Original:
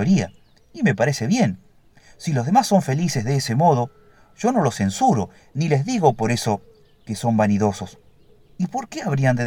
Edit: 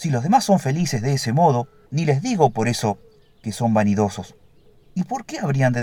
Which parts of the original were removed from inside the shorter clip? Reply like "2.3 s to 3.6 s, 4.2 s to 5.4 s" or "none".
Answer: 4.1 s to 5.5 s